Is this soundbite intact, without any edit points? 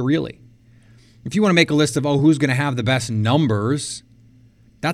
yes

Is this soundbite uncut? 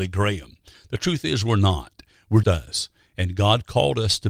no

